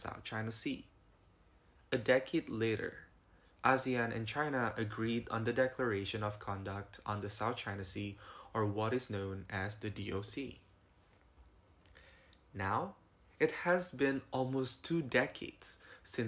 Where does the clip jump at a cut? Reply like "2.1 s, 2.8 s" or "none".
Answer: none